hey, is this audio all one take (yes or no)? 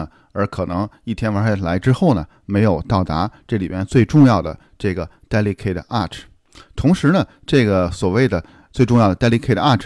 yes